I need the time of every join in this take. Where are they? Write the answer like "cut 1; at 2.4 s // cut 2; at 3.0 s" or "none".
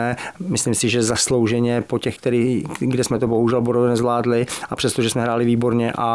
cut 1; at 2.2 s

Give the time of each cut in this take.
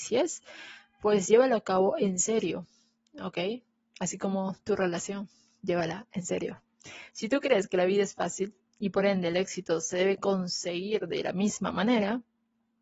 cut 1; at 7.1 s

